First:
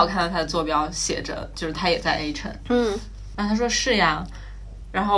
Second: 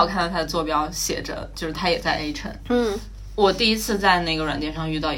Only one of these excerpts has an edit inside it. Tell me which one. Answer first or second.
first